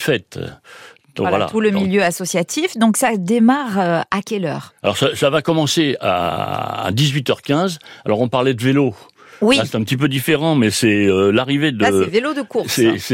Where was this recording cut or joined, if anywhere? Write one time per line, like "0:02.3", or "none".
none